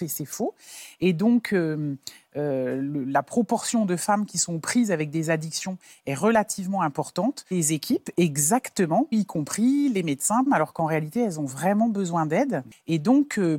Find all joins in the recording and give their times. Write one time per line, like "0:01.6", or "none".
0:07.5
0:09.1
0:10.5